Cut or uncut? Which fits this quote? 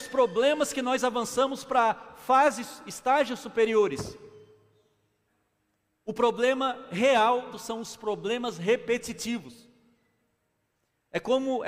cut